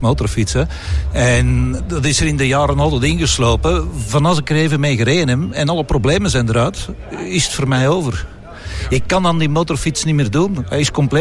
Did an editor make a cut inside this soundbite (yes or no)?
no